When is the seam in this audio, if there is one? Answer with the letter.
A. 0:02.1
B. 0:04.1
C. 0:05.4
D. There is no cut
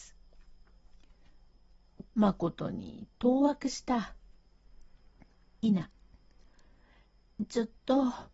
A